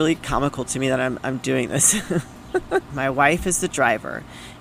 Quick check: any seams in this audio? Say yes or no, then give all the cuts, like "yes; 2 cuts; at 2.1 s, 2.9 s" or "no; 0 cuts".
yes; 1 cut; at 2.9 s